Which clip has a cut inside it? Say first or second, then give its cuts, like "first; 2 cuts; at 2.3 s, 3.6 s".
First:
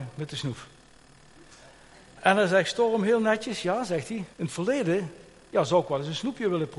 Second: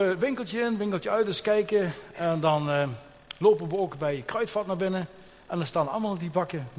first; 1 cut; at 4.3 s